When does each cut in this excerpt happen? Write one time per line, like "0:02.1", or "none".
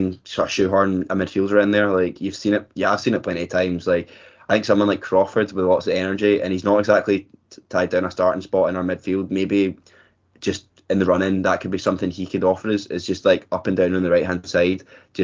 none